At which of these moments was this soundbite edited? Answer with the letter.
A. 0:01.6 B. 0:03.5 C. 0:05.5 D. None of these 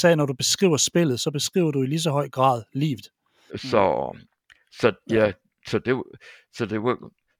B